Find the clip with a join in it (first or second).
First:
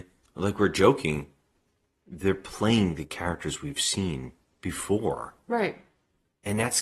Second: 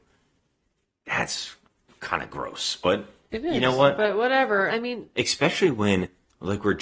second